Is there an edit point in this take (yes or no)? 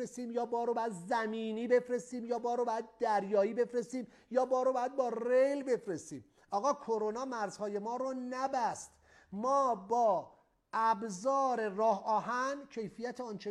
no